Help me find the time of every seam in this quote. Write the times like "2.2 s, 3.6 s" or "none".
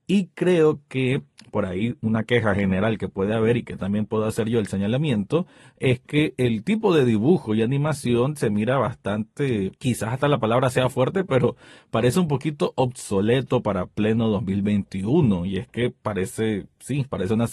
9.8 s

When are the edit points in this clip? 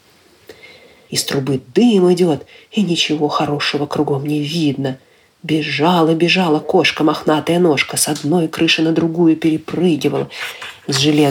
1.1 s

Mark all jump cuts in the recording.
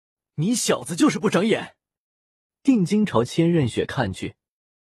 2.5 s

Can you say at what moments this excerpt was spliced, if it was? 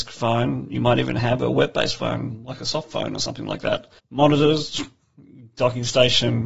4.0 s

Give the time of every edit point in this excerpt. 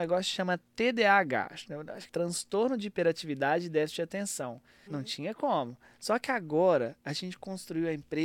2.1 s, 4.9 s

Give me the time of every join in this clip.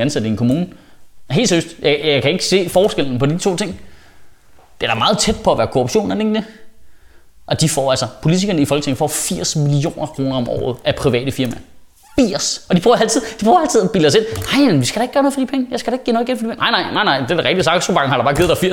none

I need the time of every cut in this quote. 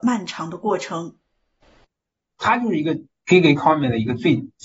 2.3 s

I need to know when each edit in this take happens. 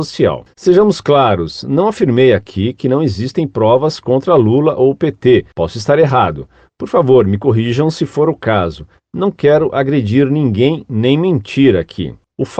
5.5 s

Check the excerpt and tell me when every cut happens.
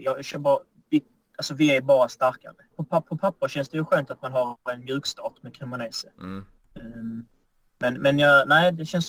2.7 s

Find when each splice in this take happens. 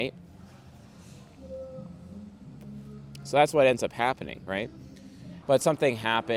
5.4 s

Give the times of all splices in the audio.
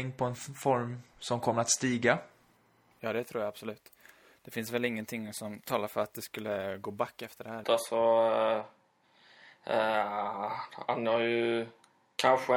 7.6 s

